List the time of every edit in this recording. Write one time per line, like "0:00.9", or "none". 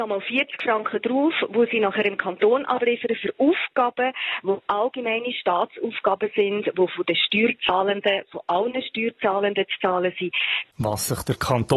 0:10.7